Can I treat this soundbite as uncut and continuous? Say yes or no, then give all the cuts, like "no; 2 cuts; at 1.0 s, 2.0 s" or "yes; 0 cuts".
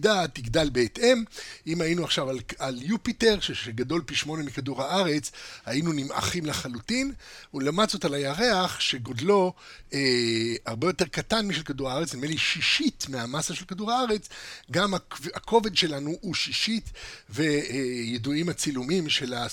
yes; 0 cuts